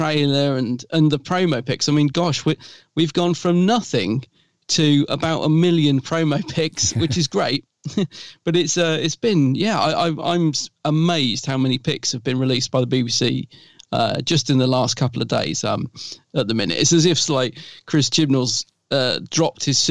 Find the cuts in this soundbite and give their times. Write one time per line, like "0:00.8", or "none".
0:15.6